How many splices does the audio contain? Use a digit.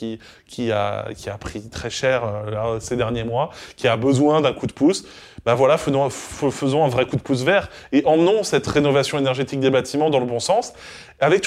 0